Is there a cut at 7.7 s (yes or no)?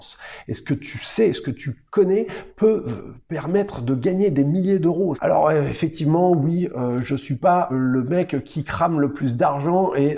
yes